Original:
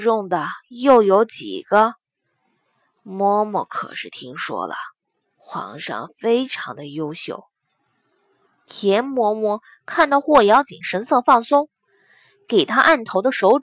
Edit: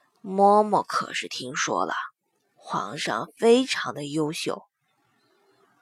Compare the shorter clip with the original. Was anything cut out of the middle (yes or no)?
no